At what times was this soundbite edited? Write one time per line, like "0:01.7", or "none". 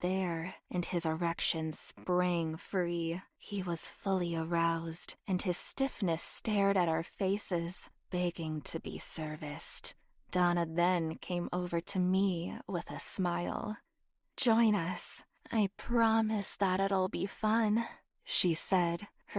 0:03.3

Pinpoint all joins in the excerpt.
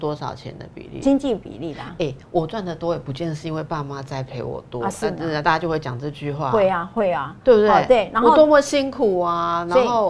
none

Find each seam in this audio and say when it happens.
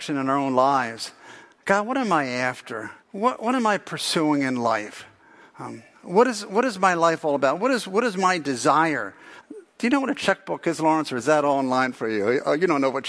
0:03.0
0:09.4

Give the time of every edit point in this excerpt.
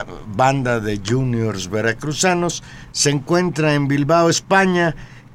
none

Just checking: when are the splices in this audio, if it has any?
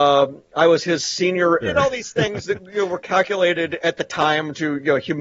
0:01.6

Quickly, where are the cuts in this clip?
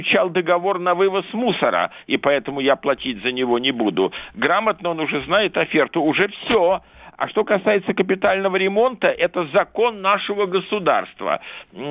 none

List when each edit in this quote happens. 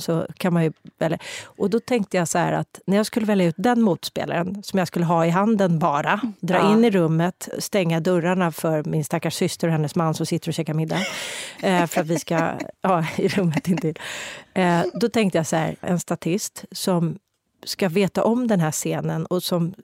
0:15.8

